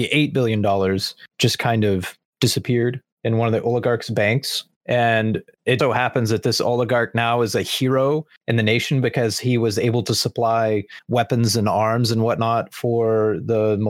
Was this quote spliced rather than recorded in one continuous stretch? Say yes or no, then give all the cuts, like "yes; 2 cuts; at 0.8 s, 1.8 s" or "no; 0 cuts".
yes; 1 cut; at 5.8 s